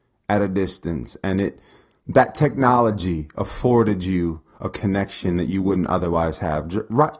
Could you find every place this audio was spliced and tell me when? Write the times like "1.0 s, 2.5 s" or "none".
none